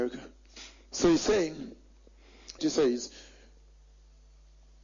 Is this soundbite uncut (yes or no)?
no